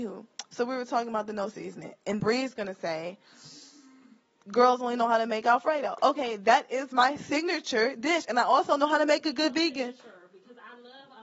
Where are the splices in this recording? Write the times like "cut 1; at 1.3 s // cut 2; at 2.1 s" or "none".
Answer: cut 1; at 2.2 s